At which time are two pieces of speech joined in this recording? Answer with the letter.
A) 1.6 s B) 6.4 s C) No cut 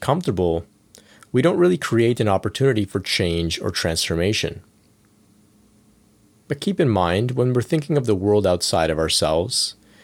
C